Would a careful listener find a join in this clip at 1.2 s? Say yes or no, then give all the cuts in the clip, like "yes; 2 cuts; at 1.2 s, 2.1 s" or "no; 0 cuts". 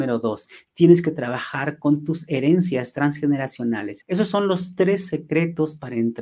no; 1 cut; at 4.0 s